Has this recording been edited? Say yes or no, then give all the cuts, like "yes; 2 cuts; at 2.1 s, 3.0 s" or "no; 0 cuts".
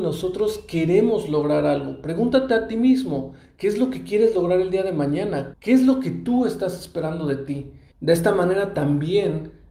yes; 2 cuts; at 5.5 s, 7.9 s